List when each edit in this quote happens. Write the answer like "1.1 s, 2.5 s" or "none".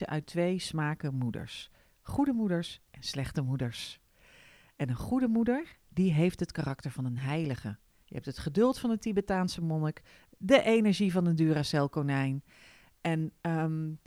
none

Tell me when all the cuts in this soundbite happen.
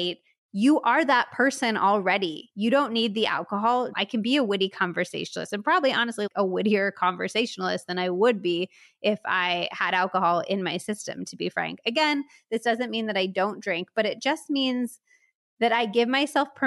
3.9 s

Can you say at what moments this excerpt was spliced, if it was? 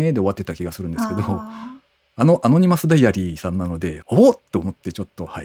4.0 s

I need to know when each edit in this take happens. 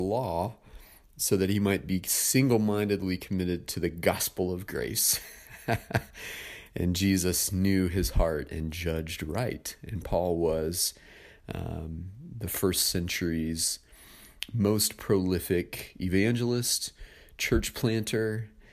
none

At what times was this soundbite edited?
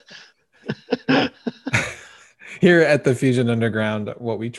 none

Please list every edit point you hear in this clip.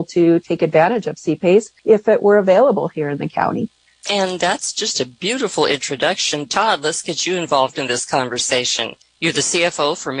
none

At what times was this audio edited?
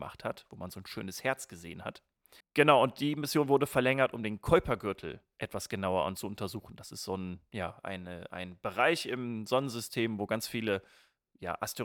2.4 s

